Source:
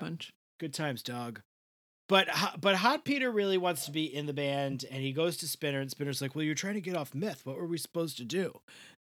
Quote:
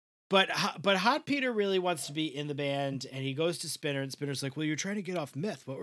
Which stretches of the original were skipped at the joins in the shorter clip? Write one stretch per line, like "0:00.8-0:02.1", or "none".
none